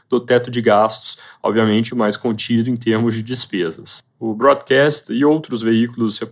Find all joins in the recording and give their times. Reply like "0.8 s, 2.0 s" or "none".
1.9 s, 4.1 s